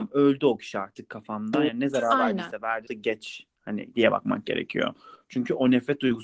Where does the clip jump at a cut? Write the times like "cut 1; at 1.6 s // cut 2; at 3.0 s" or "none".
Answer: cut 1; at 2.9 s

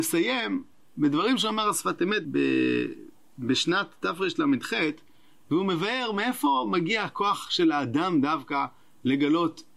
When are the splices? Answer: cut 1; at 2.2 s

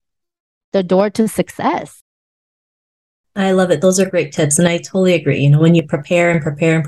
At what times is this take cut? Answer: none

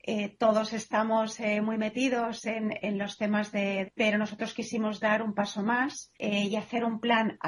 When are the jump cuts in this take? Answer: cut 1; at 3.8 s // cut 2; at 6.1 s

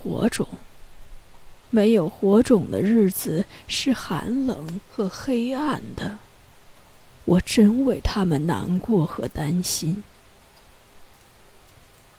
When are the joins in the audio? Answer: cut 1; at 1.6 s

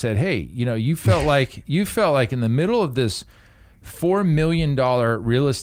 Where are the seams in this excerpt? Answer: none

